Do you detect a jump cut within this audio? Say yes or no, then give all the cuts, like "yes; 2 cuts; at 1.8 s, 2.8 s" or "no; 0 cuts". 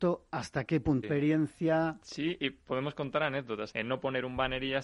yes; 2 cuts; at 1.0 s, 3.7 s